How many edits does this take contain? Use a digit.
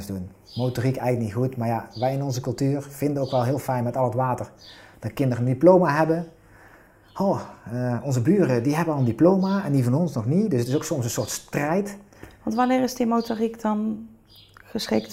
0